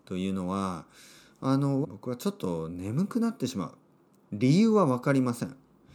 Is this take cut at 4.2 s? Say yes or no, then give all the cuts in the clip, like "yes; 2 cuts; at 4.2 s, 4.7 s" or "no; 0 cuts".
yes; 2 cuts; at 1.8 s, 4.2 s